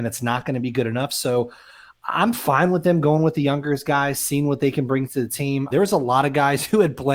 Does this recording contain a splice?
yes; 1 cut; at 5.7 s

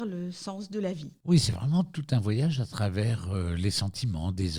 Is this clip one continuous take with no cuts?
yes; 0 cuts

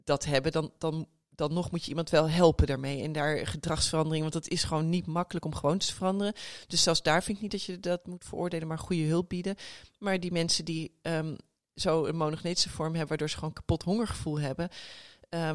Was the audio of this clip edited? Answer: no; 0 cuts

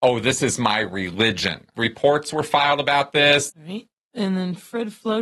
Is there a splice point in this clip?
yes; 2 cuts; at 1.7 s, 3.5 s

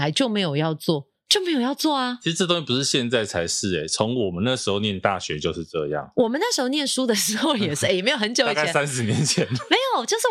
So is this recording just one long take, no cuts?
yes; 0 cuts

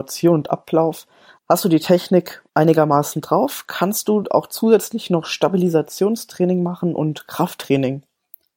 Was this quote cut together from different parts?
yes; 2 cuts; at 1.4 s, 2.5 s

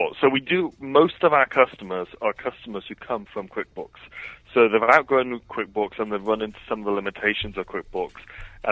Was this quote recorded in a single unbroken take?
yes; 0 cuts

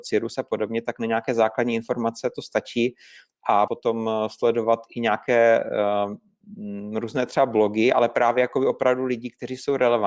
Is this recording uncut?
no; 1 cut; at 3.7 s

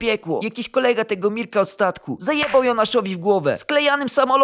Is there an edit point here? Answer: no; 0 cuts

